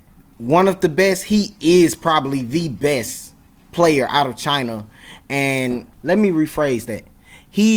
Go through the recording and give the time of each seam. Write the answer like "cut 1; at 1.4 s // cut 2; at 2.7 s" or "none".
cut 1; at 5.9 s